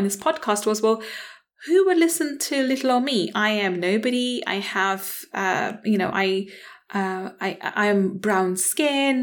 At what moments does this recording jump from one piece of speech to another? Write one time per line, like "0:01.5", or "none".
none